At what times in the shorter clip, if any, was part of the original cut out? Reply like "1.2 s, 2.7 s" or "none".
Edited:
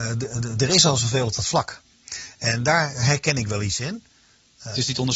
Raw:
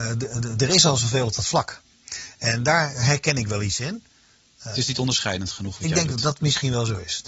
none